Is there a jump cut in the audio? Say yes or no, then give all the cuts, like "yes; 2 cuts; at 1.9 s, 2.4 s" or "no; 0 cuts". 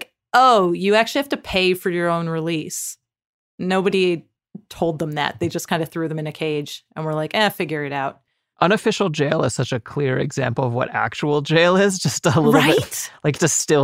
no; 0 cuts